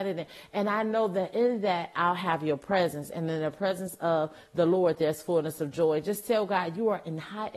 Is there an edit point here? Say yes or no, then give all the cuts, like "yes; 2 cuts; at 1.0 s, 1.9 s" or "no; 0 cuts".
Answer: no; 0 cuts